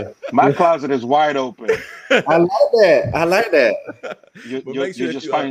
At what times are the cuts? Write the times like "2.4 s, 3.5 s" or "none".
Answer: none